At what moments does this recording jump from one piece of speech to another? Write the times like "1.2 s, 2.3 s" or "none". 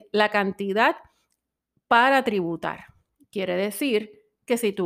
none

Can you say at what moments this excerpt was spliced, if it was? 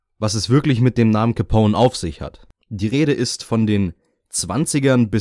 2.6 s

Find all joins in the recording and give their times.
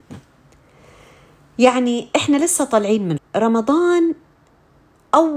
3.2 s

